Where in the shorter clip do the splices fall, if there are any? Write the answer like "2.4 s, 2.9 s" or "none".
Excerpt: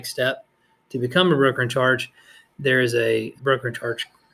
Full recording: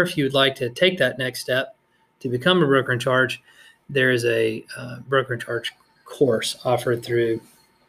3.4 s